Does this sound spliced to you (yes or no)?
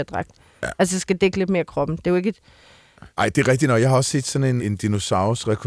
yes